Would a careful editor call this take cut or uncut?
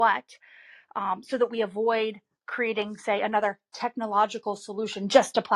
uncut